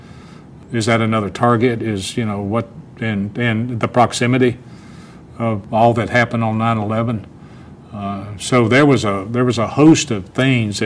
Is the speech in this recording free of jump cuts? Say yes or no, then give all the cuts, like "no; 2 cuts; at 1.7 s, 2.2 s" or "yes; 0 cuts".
yes; 0 cuts